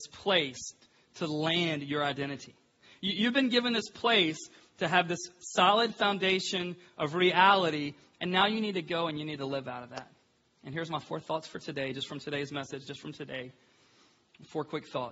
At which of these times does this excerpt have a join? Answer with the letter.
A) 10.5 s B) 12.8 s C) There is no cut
B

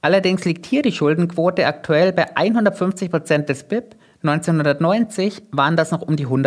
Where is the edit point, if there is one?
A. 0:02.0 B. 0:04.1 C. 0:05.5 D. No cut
D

